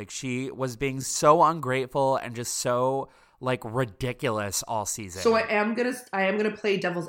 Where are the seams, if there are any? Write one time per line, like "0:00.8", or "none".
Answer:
none